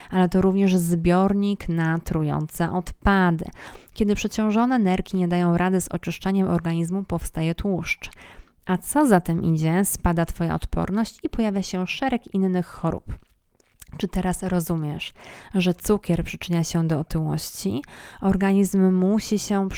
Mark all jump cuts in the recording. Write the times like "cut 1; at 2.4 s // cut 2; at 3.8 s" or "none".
none